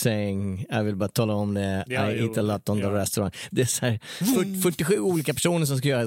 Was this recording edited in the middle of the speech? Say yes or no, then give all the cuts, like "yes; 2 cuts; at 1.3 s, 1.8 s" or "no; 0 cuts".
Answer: yes; 1 cut; at 3.5 s